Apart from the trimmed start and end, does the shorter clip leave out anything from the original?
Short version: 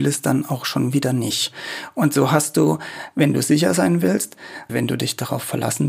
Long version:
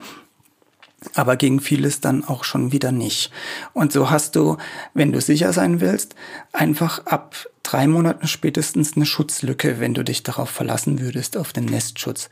yes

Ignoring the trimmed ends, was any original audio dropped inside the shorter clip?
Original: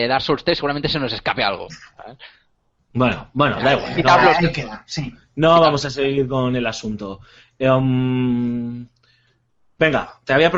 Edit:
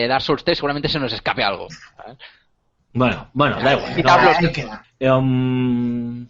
yes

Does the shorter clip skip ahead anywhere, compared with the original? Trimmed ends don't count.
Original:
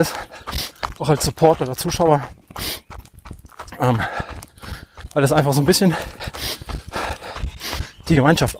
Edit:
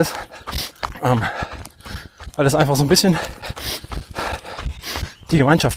yes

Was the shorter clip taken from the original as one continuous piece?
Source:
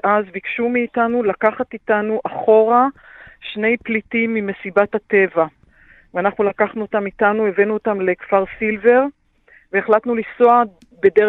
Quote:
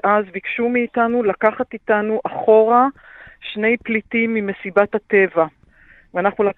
yes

